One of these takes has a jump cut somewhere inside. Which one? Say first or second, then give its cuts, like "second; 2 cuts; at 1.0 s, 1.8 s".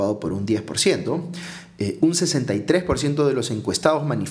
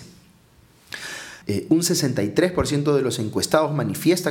second; 1 cut; at 1.4 s